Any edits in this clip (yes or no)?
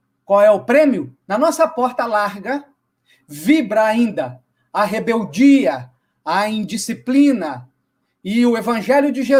yes